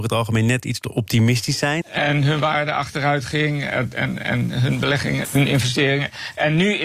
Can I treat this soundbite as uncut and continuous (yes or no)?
no